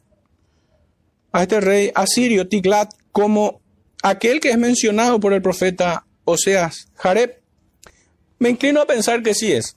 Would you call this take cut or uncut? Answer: uncut